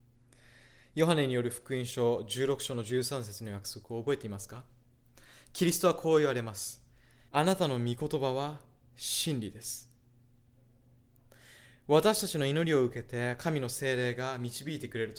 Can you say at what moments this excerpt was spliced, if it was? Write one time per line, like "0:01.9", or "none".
0:07.3

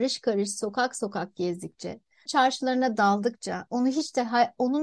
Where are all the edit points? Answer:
0:02.3

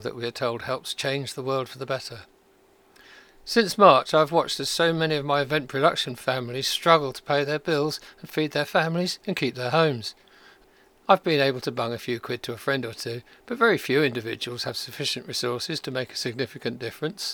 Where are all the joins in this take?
none

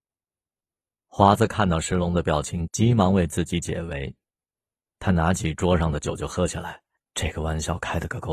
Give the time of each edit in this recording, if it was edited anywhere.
0:02.7
0:07.0

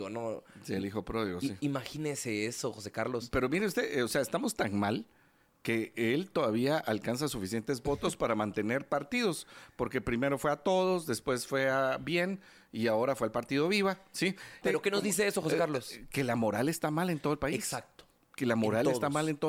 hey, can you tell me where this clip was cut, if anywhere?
0:14.6

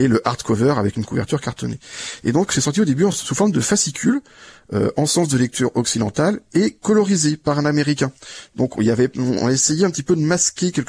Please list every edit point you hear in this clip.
none

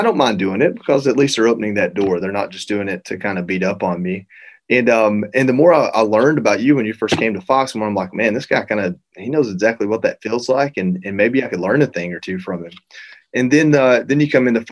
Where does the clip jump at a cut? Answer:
none

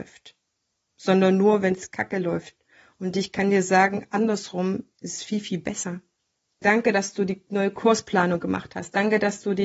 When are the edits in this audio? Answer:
0:06.6

